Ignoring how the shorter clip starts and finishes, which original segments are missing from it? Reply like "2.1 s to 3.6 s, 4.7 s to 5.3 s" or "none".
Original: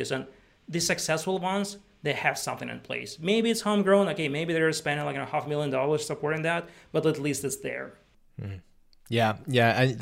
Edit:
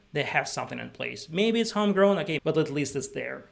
4.3 s to 6.9 s